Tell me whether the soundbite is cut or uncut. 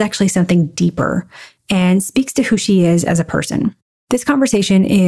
uncut